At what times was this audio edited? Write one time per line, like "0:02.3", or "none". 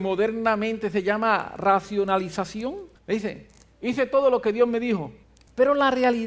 0:03.0